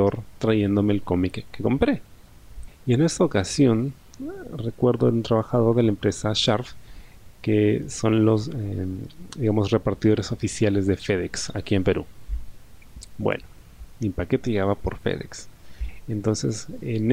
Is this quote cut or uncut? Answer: cut